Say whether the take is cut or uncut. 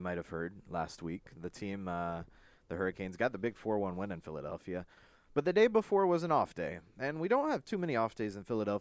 uncut